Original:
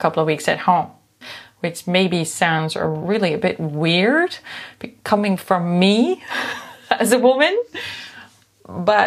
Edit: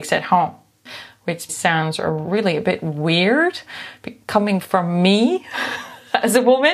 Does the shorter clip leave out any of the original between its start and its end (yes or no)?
yes